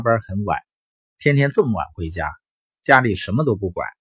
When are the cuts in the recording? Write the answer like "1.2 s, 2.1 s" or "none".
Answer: 1.0 s

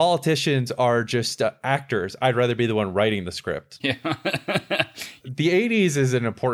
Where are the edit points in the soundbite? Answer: 3.8 s

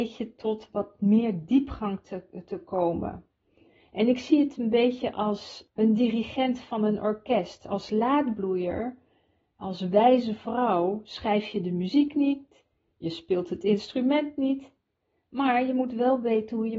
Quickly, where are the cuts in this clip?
none

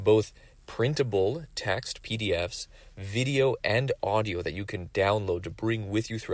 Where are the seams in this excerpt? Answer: none

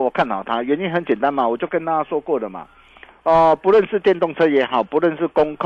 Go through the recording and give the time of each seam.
none

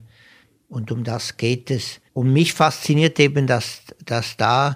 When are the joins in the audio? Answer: 2.1 s

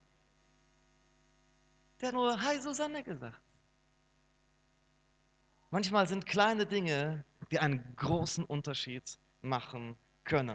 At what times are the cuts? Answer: 2.1 s

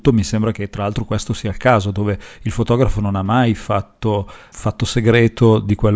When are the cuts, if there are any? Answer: 4.5 s

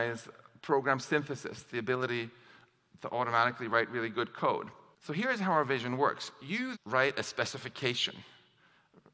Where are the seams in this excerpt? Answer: 6.7 s

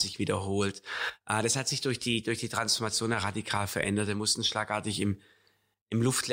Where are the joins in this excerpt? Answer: none

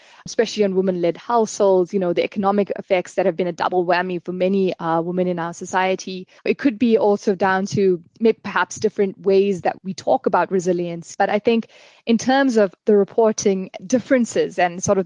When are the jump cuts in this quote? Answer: 6.4 s, 11.1 s

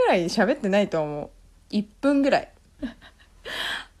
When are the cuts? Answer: 2.8 s

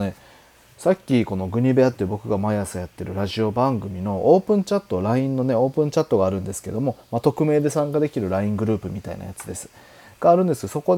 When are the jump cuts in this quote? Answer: none

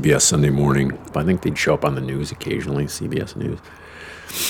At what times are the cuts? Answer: 1.1 s

